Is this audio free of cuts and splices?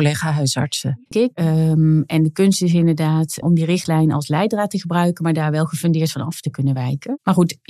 no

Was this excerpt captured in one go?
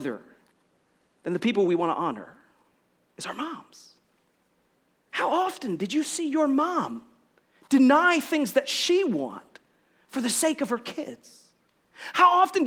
yes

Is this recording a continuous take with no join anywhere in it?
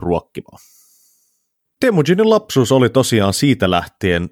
yes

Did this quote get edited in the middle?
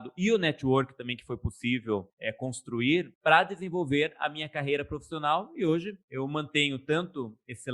no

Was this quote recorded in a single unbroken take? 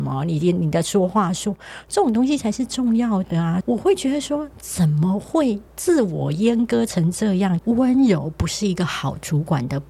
no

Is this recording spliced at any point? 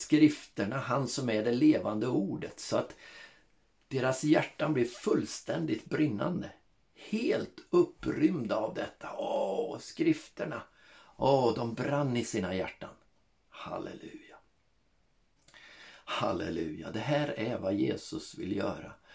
no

